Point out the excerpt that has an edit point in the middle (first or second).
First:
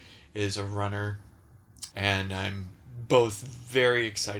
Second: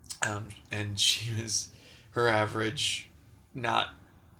first